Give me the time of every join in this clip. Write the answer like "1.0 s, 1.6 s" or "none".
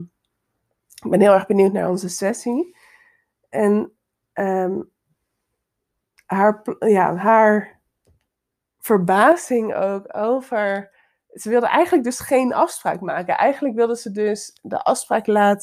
none